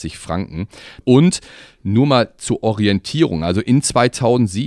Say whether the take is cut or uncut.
cut